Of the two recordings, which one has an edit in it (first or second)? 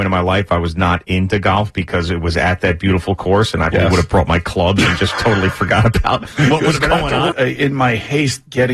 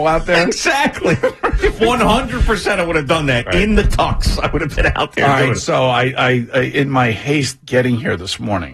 first